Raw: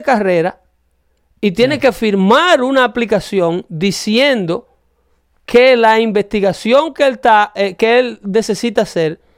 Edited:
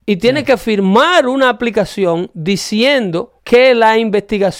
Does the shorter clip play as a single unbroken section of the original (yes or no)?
no